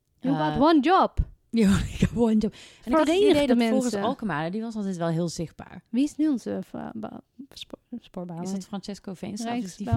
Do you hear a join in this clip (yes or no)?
no